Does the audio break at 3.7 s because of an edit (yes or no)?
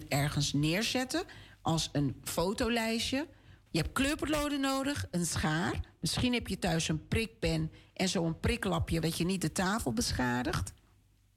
yes